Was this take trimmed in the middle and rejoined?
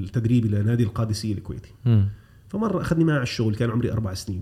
no; 0 cuts

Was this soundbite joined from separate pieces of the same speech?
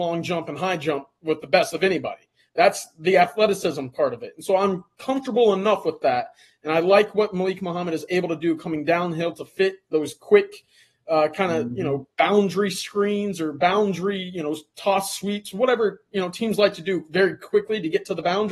no; 0 cuts

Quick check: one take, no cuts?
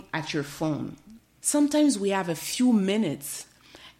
no; 1 cut; at 1.2 s

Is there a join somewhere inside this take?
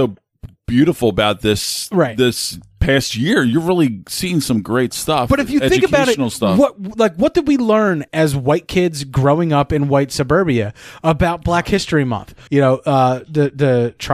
yes; 2 cuts; at 8.1 s, 12.5 s

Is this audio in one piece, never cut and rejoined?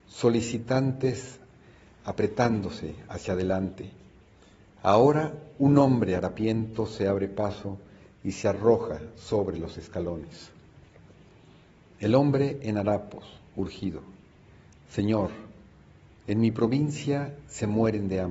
yes; 0 cuts

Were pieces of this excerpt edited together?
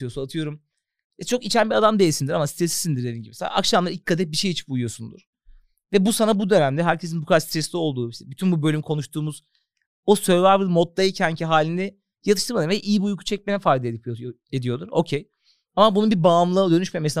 no; 0 cuts

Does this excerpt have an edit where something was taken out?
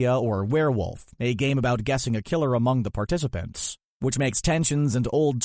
no; 0 cuts

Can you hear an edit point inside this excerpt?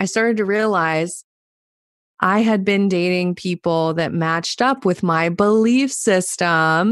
no; 0 cuts

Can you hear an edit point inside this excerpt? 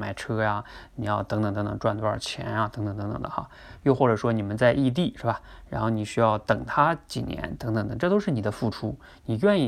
no; 0 cuts

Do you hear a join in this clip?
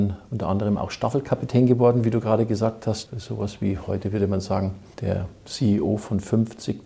yes; 1 cut; at 3.1 s

